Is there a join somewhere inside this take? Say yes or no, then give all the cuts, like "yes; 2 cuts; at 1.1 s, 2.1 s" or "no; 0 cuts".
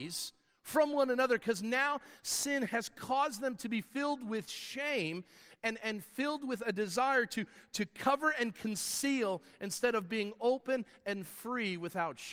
no; 0 cuts